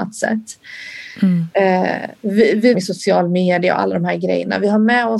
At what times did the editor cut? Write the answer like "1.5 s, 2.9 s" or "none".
2.7 s

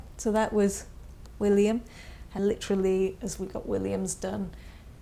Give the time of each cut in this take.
2.4 s

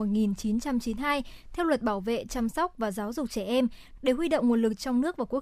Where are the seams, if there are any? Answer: 4.0 s

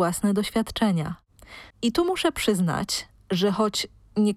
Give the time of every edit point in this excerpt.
1.7 s

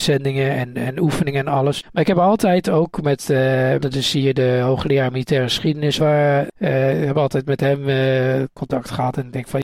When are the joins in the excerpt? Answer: 3.8 s, 6.0 s

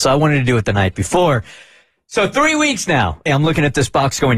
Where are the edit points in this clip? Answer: 3.3 s

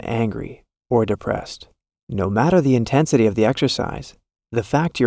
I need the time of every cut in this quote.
2.0 s

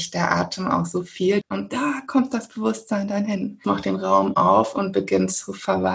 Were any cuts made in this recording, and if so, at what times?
1.4 s, 3.6 s

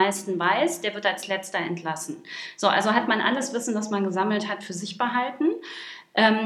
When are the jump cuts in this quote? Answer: none

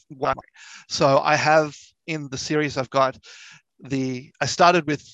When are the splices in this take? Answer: none

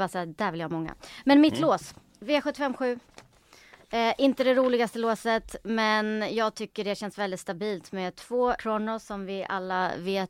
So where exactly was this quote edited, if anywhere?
8.6 s

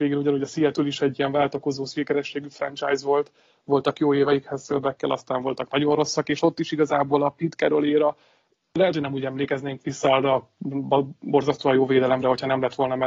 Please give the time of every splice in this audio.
none

